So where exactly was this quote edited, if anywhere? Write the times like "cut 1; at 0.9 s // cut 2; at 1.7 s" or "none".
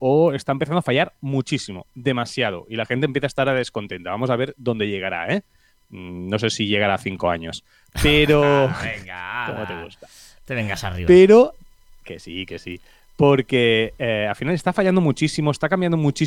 none